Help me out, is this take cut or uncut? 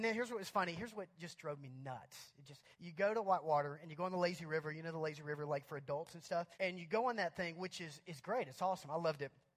cut